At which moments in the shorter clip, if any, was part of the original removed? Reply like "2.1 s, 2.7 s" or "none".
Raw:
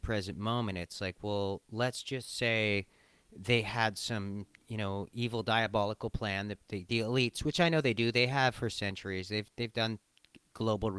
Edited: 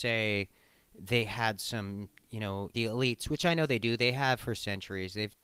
2.7 s

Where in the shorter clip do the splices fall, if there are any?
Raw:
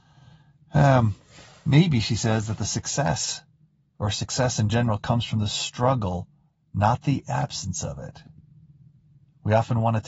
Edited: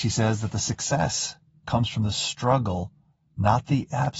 1.6 s

